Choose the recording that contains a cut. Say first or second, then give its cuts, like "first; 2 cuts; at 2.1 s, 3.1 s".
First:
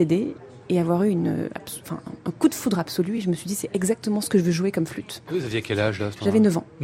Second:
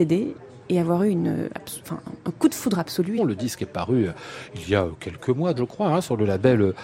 second; 2 cuts; at 3.2 s, 5.6 s